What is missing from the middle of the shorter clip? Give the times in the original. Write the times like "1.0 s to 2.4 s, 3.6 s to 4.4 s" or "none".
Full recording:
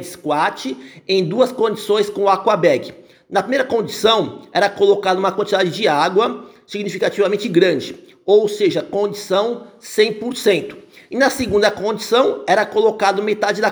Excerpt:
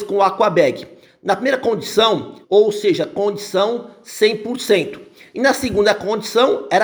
4.5 s to 8.2 s

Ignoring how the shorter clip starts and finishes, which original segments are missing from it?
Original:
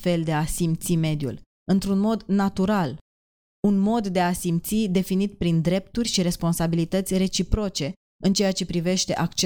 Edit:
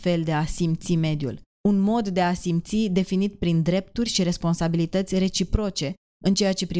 1.5 s to 3.5 s

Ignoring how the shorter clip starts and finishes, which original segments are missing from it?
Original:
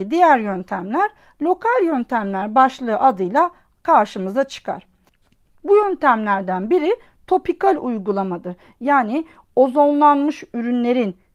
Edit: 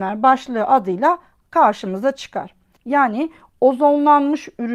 5.1 s to 8.8 s

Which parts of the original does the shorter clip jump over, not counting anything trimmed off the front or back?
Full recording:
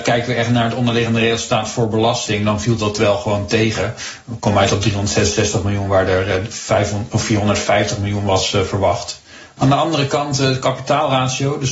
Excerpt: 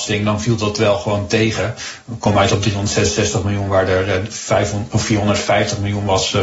none

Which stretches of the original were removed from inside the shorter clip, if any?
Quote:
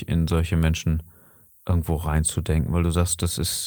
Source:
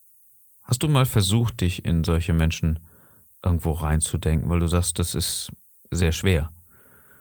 none

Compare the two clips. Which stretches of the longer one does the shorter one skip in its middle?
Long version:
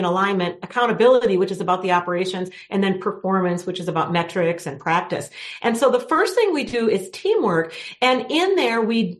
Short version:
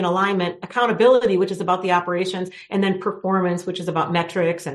none

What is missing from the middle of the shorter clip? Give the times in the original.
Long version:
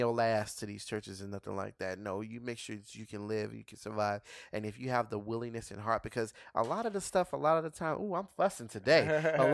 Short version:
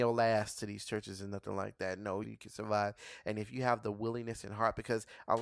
2.2 s to 3.5 s

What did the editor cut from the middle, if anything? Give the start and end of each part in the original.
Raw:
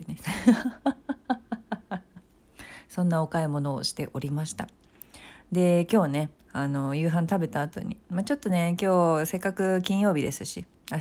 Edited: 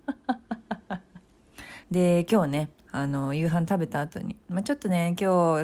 2.8 s to 5.4 s

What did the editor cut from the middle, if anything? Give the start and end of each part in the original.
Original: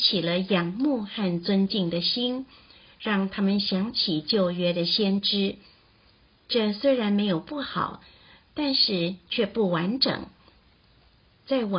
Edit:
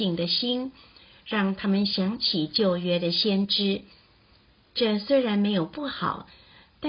none

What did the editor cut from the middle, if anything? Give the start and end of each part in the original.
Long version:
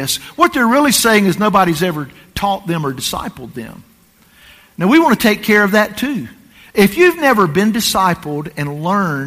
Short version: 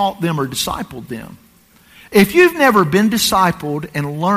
4.4 s to 6.6 s

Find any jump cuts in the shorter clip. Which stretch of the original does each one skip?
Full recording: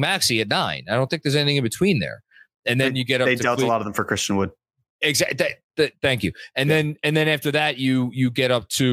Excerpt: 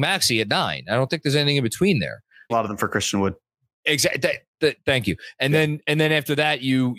2.5 s to 3.7 s

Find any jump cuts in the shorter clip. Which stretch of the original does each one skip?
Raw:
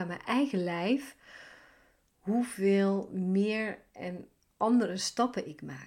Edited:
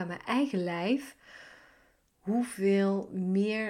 none

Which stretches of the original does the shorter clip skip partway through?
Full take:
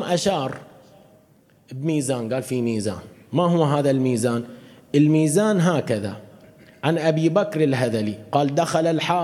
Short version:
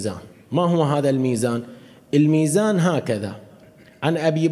none

